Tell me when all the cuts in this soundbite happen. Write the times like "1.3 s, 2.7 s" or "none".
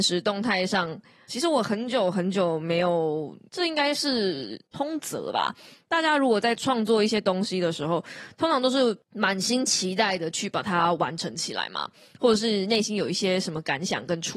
1.3 s, 3.5 s